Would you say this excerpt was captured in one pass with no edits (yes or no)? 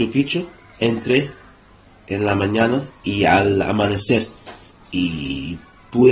yes